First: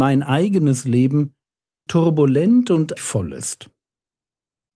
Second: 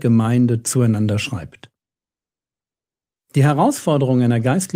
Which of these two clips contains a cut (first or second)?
first